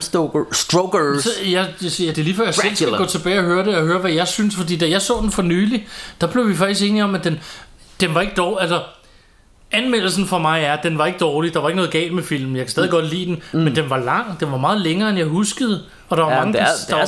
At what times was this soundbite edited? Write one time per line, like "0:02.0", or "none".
none